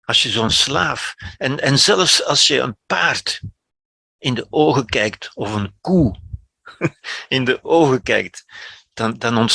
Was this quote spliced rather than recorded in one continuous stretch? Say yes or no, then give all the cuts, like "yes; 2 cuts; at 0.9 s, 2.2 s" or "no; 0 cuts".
no; 0 cuts